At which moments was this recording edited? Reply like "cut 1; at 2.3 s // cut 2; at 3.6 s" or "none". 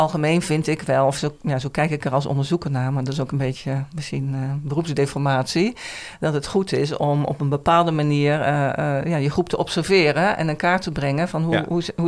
none